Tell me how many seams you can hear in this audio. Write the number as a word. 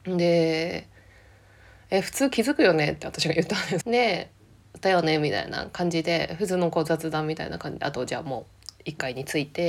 one